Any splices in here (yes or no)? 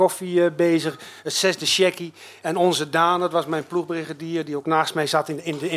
no